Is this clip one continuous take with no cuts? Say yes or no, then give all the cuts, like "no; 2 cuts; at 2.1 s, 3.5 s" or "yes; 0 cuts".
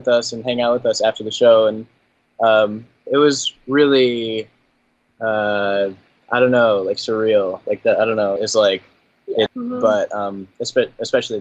no; 2 cuts; at 8.4 s, 9.5 s